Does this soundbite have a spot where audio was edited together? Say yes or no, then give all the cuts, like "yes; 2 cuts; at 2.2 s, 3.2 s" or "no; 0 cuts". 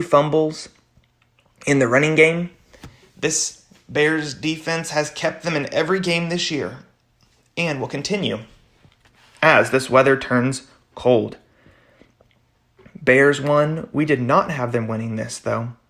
no; 0 cuts